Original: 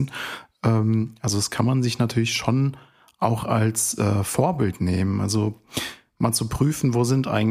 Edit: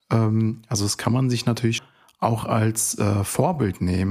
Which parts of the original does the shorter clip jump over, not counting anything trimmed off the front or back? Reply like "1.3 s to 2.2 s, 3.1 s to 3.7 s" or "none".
2.3 s to 2.8 s